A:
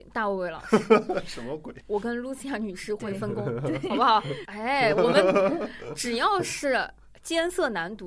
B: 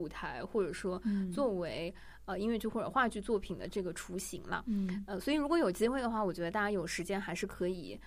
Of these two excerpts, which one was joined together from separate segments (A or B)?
A